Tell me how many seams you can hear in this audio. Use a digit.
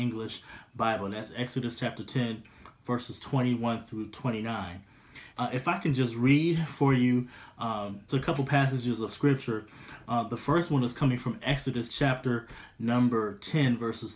2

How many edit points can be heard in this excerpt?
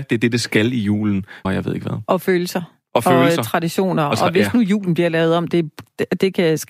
2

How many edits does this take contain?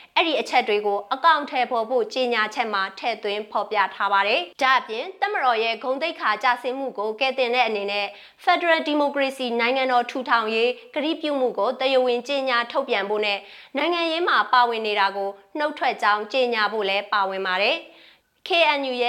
1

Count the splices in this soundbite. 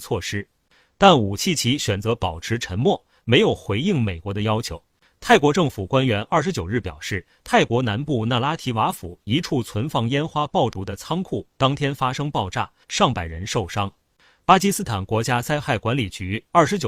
2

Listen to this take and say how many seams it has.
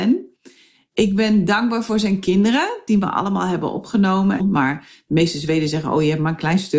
1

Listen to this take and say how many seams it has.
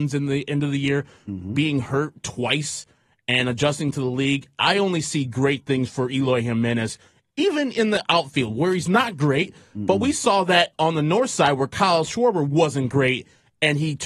0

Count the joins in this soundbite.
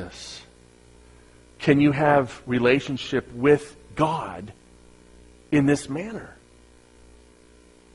0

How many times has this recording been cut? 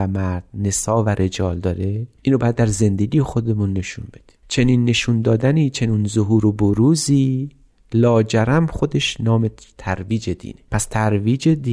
1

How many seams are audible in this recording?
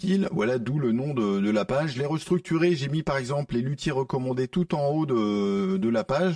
0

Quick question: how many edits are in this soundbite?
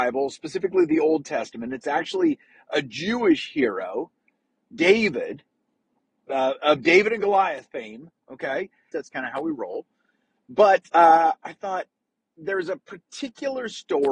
2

